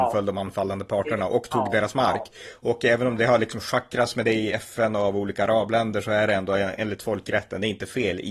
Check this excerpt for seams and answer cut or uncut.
uncut